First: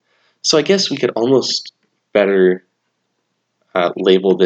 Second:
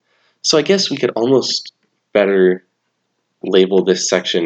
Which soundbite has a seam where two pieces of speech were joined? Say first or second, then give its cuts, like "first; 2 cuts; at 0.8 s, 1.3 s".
second; 1 cut; at 3.4 s